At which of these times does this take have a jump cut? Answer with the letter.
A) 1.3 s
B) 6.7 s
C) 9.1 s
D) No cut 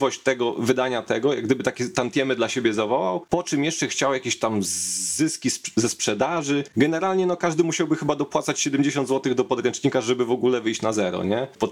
D